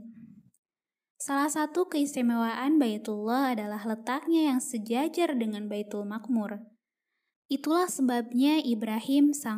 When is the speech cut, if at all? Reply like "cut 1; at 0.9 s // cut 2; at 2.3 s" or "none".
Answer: cut 1; at 7.3 s